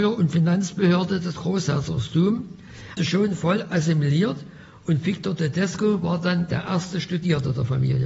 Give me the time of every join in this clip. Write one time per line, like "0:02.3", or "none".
0:03.0